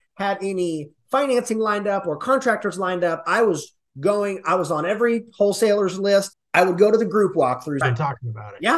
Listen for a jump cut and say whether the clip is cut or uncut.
cut